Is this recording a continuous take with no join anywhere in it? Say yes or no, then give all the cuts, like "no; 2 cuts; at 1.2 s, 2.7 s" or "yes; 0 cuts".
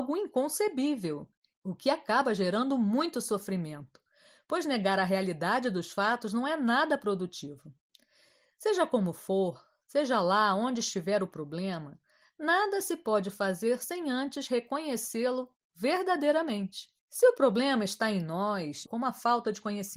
no; 3 cuts; at 1.5 s, 17.0 s, 18.9 s